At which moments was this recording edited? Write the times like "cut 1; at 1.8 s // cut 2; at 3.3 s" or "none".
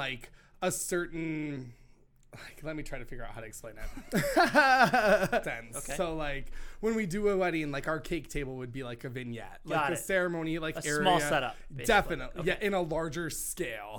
cut 1; at 5.4 s